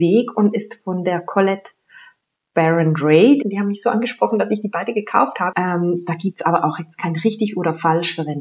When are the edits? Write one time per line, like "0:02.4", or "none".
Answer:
0:03.4
0:05.5